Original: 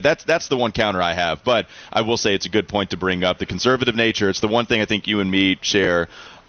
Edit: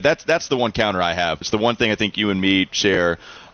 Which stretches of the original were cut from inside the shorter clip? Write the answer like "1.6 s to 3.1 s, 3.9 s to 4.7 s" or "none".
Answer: 1.4 s to 4.3 s